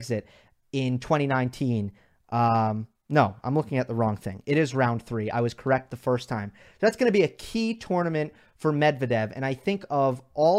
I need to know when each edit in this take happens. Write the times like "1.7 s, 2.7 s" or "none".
none